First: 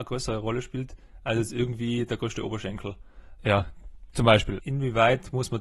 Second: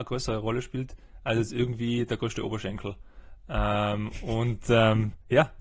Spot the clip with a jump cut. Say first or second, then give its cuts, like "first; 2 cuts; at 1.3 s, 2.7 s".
first; 2 cuts; at 3.4 s, 4.6 s